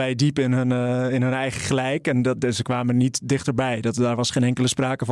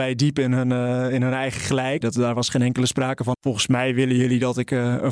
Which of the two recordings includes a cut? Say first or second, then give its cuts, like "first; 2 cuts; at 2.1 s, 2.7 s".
second; 2 cuts; at 2.0 s, 3.3 s